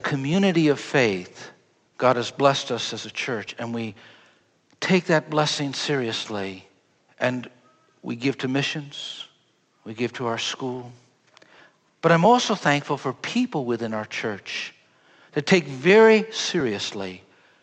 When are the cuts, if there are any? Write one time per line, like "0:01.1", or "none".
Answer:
none

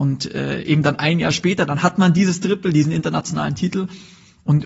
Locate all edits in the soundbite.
none

